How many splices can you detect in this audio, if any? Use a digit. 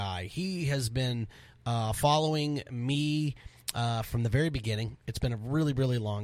0